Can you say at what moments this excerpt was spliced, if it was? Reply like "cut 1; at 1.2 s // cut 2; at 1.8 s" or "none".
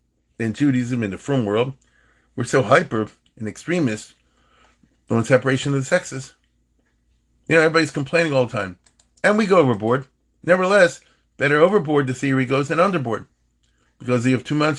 none